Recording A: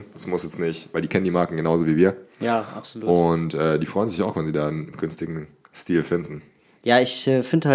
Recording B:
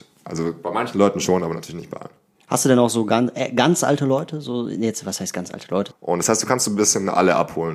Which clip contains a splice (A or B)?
B